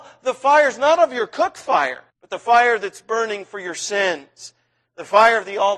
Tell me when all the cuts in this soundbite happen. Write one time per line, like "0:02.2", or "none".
0:02.1

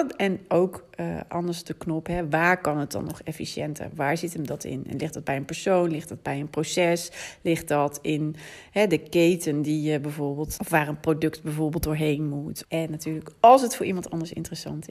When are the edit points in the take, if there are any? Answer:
0:10.6
0:12.6

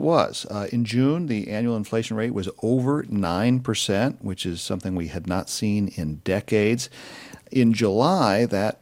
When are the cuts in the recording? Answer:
none

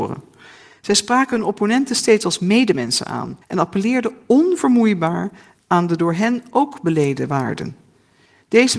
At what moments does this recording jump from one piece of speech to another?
0:03.4

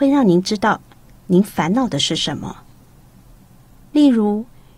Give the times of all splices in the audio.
0:03.8

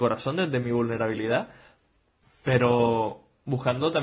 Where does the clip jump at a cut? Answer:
0:02.2

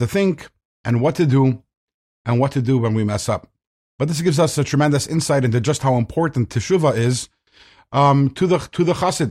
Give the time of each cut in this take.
none

